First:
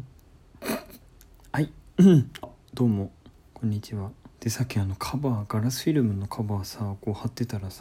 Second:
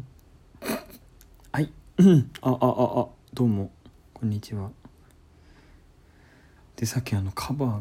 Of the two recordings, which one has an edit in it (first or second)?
first